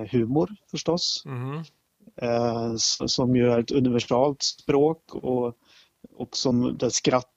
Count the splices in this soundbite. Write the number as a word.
zero